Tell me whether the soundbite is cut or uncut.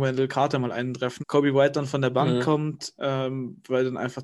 cut